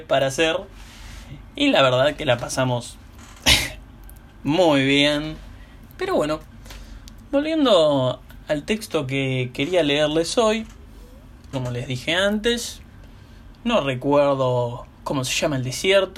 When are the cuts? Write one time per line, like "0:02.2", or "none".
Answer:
0:05.9
0:11.5